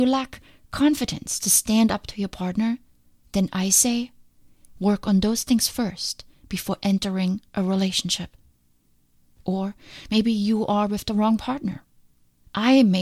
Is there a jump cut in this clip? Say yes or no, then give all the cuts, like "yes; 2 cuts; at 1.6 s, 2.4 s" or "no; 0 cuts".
no; 0 cuts